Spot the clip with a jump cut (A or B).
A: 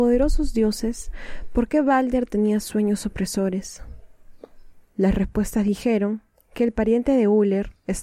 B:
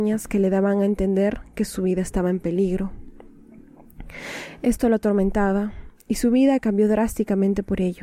A